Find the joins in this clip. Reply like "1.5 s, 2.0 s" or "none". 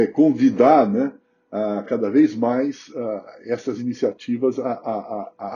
none